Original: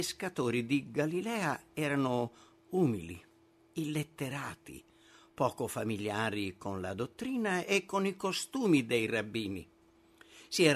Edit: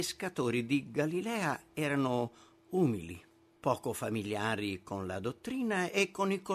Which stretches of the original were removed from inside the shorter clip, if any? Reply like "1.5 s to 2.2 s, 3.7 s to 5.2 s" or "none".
3.6 s to 5.3 s